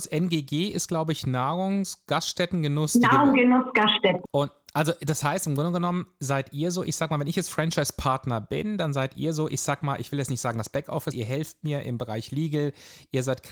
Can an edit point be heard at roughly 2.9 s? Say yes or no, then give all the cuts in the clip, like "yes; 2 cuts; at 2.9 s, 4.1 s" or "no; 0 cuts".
no; 2 cuts; at 4.3 s, 11.1 s